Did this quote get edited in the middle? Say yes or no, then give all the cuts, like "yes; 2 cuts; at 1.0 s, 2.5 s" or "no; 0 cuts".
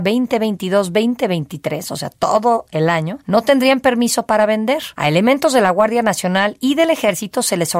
no; 0 cuts